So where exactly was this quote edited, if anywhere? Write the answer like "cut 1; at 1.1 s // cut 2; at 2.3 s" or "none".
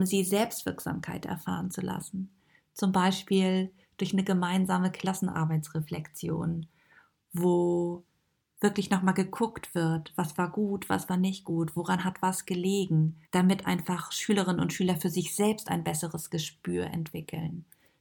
cut 1; at 13.2 s